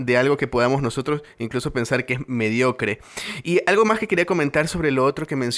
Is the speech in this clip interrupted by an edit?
no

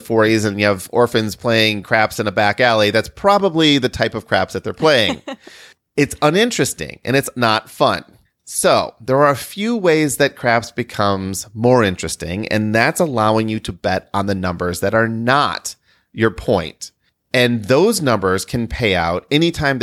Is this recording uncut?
yes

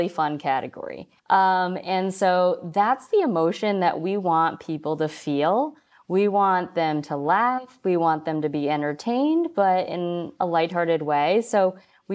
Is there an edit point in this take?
yes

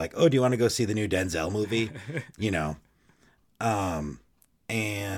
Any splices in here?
no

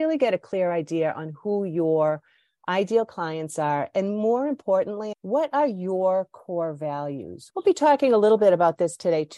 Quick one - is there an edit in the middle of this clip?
yes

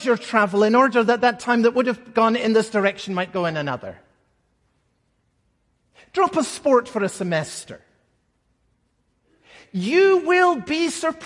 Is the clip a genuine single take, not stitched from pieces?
yes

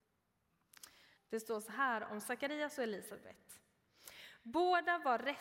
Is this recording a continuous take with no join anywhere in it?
no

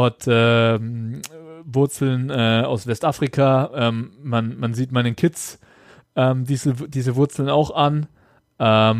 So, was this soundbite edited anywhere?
no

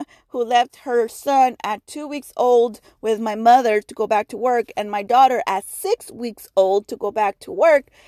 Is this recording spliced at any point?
no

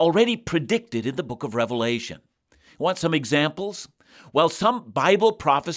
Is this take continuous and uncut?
yes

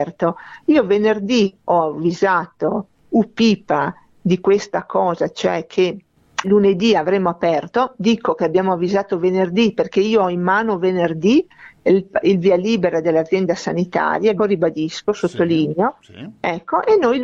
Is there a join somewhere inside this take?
yes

